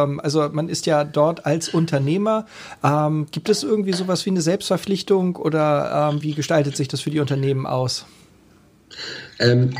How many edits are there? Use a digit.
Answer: 1